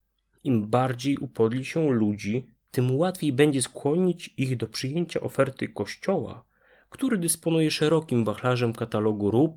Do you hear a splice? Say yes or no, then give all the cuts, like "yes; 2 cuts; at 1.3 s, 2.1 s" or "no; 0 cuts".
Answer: yes; 1 cut; at 2.7 s